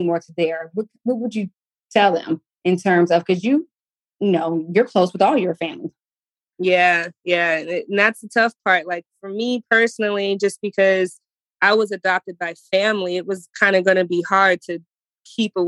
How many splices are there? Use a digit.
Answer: 1